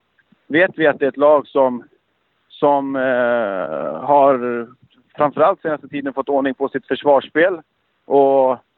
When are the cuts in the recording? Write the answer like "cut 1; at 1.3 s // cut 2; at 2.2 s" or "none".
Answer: none